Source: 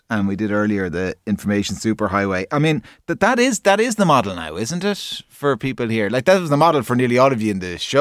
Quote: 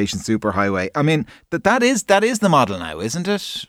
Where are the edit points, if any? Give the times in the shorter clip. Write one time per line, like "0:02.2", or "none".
none